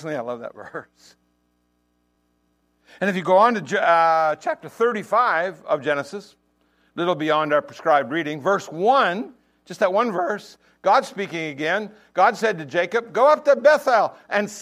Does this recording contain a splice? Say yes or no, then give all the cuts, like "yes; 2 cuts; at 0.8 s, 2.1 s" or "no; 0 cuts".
no; 0 cuts